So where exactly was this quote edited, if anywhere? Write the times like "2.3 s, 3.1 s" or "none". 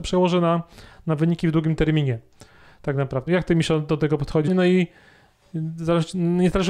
3.3 s, 4.5 s